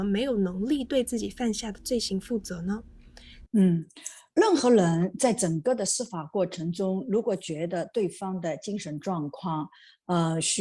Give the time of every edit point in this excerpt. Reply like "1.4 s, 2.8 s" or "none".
3.5 s